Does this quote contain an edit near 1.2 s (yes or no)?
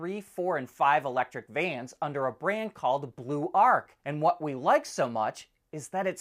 no